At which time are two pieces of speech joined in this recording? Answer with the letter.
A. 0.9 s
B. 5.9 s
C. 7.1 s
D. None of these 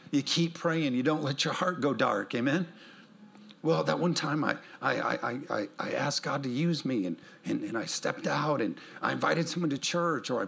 D